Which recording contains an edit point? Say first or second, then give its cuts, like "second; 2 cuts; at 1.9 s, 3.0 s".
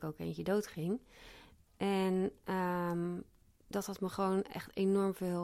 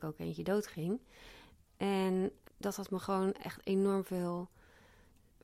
second; 1 cut; at 2.5 s